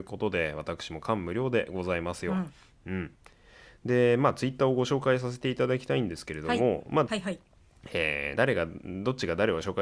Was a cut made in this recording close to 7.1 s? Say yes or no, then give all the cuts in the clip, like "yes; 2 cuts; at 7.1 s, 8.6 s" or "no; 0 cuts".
yes; 2 cuts; at 7.1 s, 8.4 s